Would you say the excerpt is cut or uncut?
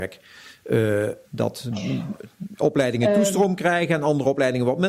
cut